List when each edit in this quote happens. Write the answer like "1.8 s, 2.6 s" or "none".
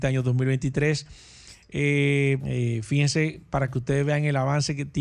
2.4 s